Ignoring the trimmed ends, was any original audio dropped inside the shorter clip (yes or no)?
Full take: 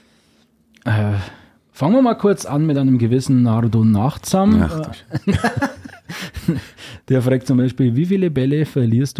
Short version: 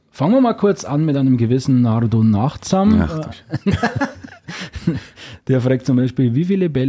no